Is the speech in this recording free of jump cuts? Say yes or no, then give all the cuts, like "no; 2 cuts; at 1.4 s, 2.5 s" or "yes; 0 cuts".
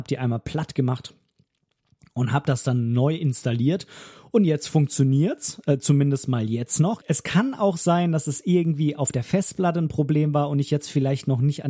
no; 1 cut; at 7.0 s